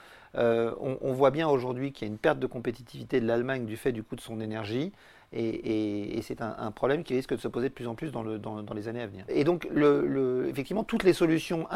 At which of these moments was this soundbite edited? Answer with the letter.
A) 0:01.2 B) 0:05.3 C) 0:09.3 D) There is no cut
C